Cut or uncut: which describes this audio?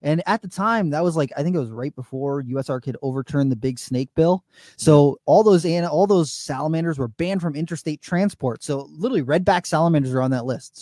uncut